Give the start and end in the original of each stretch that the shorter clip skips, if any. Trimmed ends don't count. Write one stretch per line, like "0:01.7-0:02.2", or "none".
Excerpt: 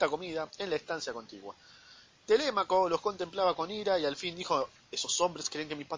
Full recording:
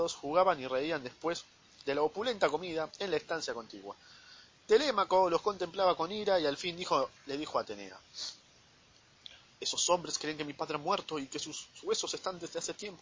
0:07.2-0:09.5